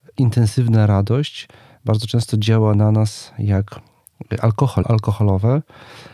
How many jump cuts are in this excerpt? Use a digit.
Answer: 1